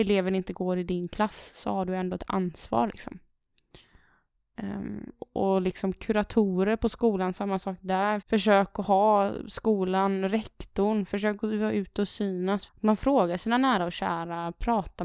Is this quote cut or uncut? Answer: cut